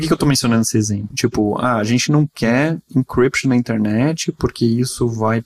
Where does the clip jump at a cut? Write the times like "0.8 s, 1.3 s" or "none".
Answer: 1.1 s